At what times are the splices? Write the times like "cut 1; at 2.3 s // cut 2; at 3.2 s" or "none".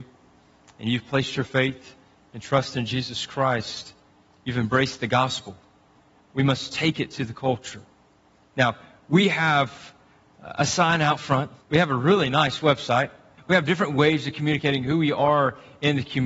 cut 1; at 11.6 s // cut 2; at 13.4 s